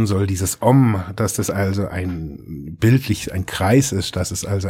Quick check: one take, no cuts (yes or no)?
yes